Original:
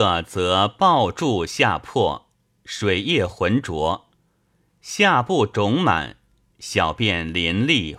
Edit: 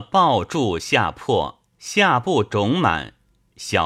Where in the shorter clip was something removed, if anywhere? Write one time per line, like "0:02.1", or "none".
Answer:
0:01.7